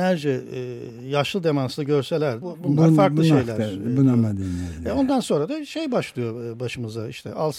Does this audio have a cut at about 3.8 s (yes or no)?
no